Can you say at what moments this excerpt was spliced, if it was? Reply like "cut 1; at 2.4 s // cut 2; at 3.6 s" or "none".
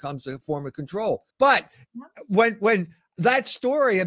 cut 1; at 1.3 s